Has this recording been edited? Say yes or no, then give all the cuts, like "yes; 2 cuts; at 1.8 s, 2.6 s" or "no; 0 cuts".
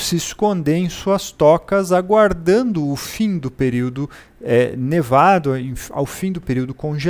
no; 0 cuts